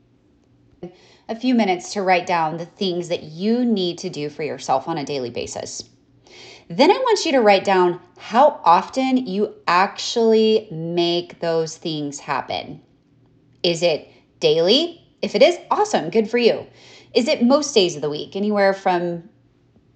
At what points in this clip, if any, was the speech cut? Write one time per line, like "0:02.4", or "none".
none